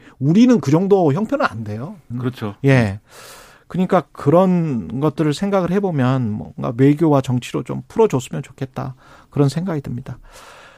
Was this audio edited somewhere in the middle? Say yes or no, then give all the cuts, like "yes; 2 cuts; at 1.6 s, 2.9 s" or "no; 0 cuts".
yes; 1 cut; at 2.1 s